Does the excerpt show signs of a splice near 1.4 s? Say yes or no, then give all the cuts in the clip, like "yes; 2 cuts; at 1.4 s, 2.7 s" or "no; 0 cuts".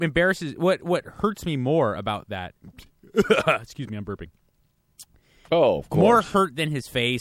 no; 2 cuts; at 2.7 s, 5.5 s